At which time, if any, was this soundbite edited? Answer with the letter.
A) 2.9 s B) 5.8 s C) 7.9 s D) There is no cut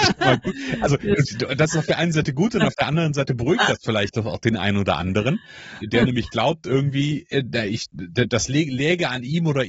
B